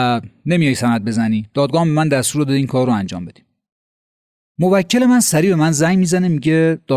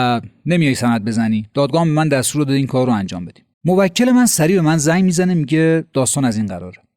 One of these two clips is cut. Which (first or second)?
second